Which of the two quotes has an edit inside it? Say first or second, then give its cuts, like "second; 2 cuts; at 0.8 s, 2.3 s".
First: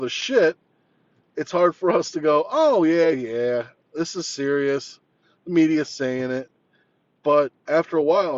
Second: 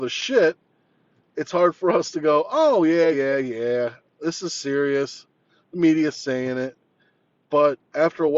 first; 1 cut; at 3.1 s